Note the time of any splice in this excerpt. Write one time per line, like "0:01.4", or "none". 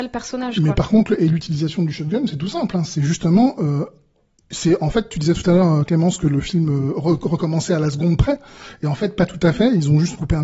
none